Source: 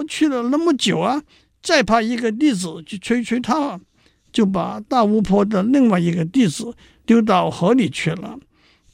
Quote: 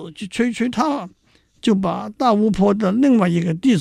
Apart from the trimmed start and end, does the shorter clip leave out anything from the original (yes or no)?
no